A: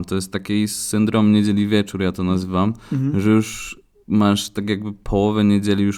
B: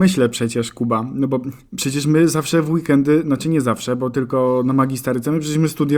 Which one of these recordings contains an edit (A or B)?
B